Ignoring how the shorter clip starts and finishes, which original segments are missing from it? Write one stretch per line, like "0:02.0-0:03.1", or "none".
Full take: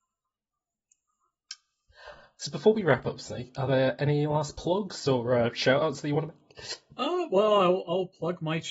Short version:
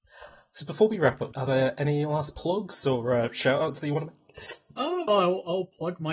0:03.2-0:03.5
0:07.3-0:07.5

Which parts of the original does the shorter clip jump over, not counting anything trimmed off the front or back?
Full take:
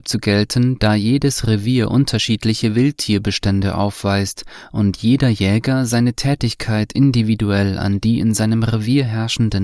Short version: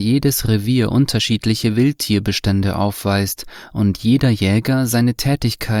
none

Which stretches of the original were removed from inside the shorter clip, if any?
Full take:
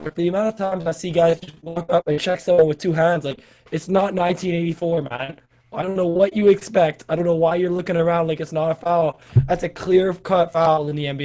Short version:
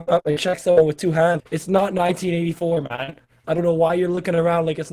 0:03.2-0:03.6
0:05.6-0:07.1

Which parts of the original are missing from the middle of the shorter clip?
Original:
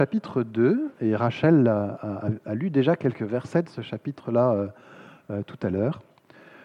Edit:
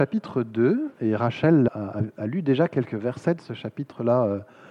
0:01.7-0:02.0

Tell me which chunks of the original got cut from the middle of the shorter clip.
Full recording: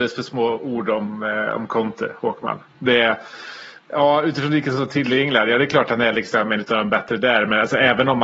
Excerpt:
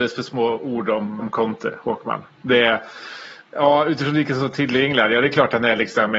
0:01.2-0:01.6

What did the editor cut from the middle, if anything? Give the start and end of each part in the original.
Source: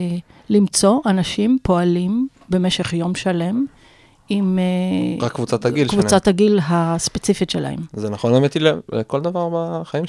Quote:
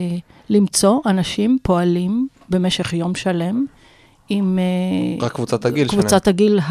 none

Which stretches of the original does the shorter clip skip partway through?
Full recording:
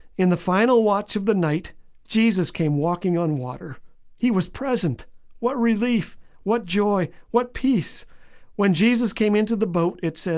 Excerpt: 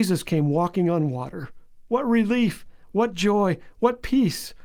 0:04.2-0:05.4

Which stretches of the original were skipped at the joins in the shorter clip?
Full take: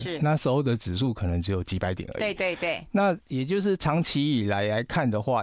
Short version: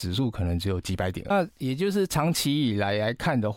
0:02.1-0:03.0

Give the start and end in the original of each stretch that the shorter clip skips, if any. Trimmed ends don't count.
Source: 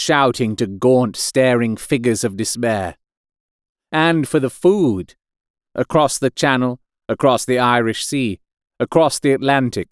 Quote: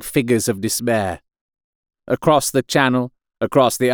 0:03.7-0:05.6

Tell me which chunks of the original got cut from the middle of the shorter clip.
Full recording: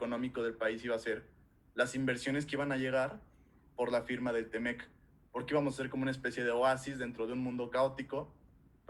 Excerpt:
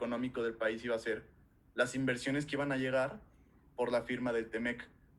none

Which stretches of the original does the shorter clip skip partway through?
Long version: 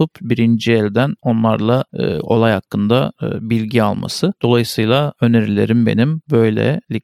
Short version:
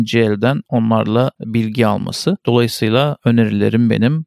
0:02.0-0:03.4

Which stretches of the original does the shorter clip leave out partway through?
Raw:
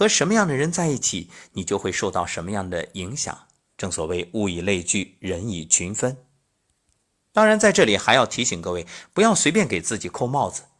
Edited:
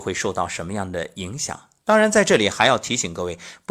0:03.6-0:07.3

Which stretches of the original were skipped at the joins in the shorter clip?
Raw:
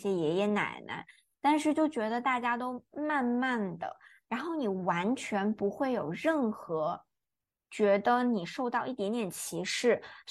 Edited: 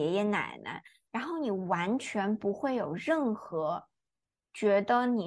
0:01.3-0:04.2

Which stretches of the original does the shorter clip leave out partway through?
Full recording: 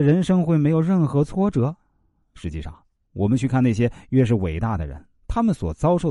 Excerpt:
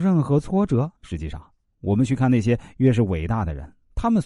0:01.8-0:02.3

